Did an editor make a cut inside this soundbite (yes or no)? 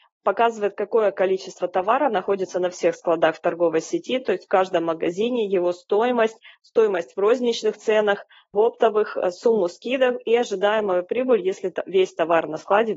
no